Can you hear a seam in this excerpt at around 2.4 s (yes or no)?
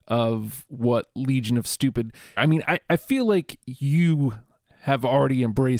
yes